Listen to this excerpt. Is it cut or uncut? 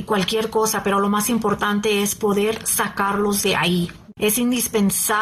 cut